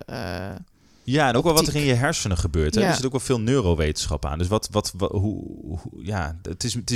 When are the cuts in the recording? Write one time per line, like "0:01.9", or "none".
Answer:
none